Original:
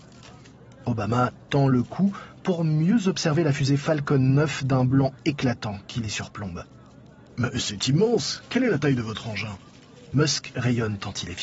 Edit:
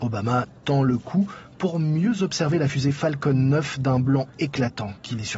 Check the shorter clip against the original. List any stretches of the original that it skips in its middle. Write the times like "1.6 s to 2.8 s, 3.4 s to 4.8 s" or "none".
none